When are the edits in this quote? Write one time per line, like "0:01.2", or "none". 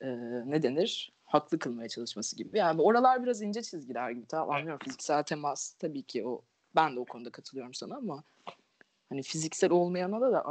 none

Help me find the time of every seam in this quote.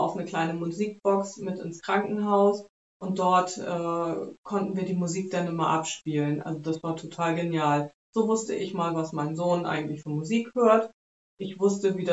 none

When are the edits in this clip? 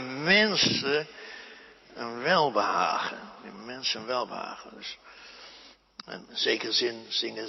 none

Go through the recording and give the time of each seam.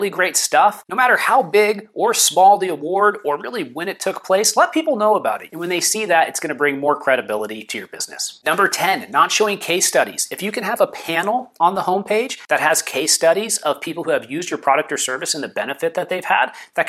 0:05.5

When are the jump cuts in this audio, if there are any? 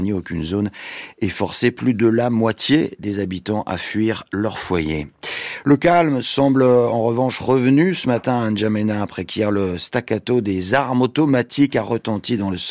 none

